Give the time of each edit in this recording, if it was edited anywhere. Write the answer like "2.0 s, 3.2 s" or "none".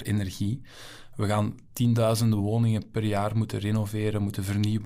none